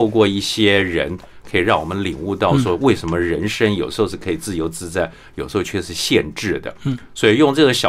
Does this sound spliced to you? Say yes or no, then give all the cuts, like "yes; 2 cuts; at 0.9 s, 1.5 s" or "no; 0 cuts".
no; 0 cuts